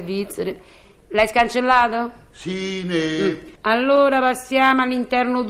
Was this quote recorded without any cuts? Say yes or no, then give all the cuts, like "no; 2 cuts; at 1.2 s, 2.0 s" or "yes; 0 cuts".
no; 1 cut; at 3.5 s